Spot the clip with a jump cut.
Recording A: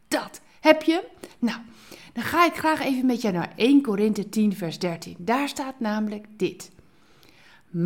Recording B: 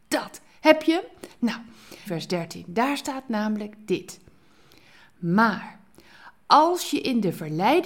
B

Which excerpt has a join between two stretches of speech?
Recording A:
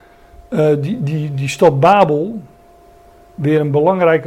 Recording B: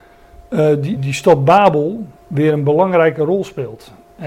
B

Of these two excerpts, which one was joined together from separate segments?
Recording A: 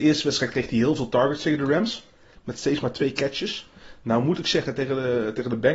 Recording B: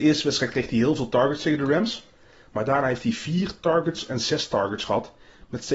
A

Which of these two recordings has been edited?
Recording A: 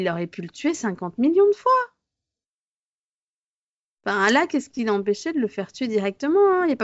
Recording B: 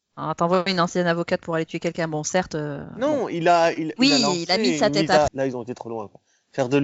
B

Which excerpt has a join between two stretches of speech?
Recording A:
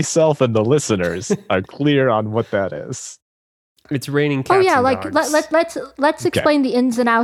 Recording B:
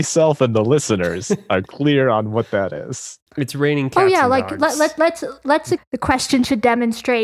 B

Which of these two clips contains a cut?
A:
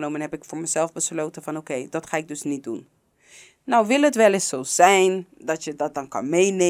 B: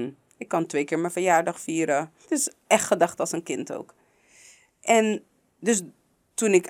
B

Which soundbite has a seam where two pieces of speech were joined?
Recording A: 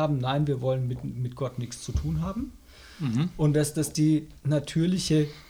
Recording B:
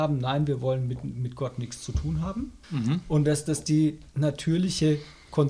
B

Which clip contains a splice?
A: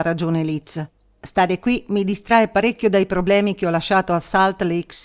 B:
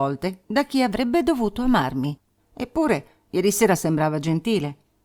B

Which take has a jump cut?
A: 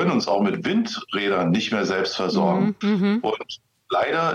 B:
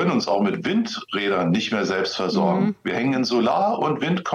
A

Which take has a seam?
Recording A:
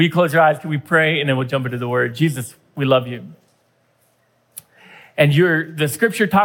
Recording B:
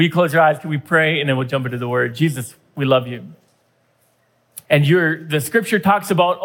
B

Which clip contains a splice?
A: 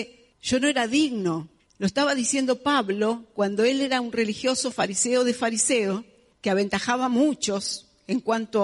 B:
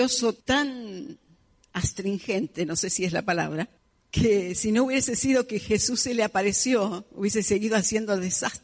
A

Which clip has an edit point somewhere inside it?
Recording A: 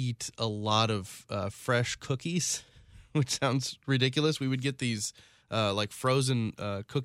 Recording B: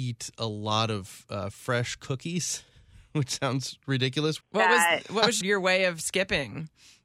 B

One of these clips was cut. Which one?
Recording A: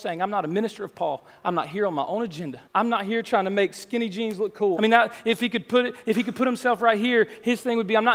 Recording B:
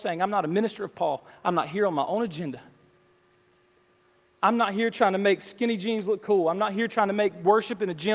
A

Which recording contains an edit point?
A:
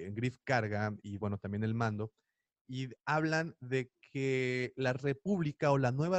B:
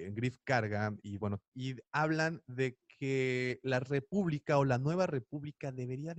B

